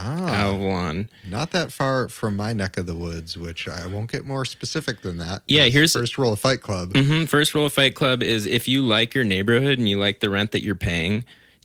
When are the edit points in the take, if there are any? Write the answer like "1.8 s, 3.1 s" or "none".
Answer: none